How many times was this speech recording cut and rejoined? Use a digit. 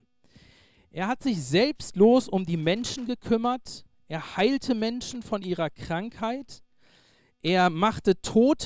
0